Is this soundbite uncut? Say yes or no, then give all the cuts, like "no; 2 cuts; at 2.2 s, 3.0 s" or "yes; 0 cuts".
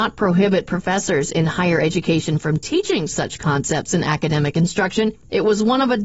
yes; 0 cuts